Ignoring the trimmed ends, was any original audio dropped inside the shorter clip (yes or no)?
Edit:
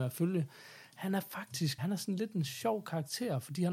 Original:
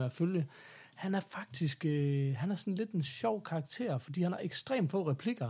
yes